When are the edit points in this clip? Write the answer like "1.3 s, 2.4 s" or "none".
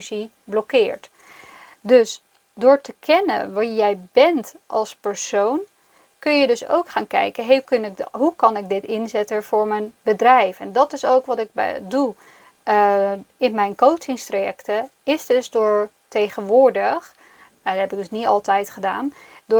7.6 s